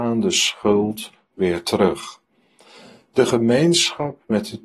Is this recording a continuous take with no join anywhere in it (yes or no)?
yes